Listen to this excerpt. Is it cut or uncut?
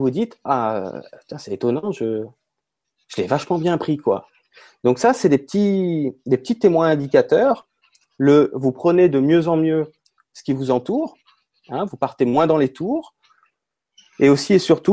uncut